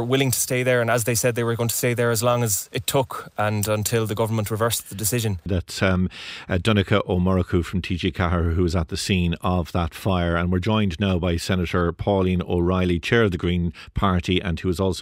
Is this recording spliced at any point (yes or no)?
yes